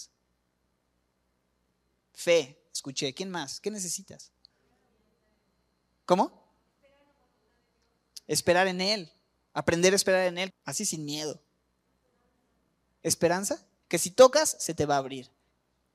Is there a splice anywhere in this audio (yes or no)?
yes